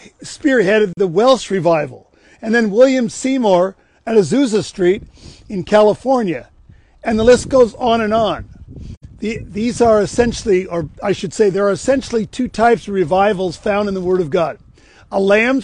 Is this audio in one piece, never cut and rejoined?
yes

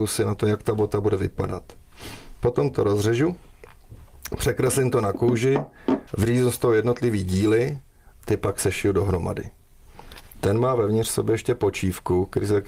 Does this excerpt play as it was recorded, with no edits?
no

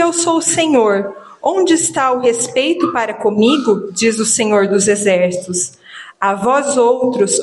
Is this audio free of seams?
yes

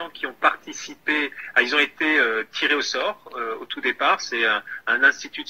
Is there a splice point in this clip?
no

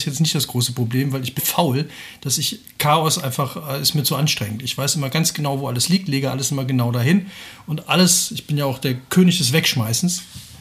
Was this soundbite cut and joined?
yes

